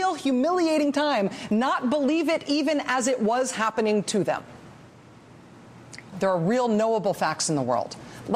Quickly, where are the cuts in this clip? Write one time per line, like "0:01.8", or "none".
0:06.1